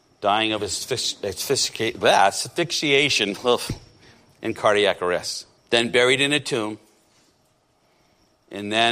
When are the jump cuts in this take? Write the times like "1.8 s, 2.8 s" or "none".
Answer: 5.6 s